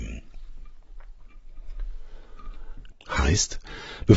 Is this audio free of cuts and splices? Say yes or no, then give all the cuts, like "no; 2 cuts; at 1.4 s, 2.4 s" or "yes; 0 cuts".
no; 1 cut; at 2.9 s